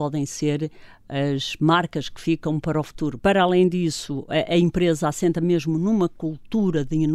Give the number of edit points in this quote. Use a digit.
1